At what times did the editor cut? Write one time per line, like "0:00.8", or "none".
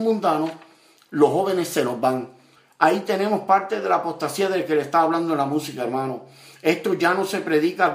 none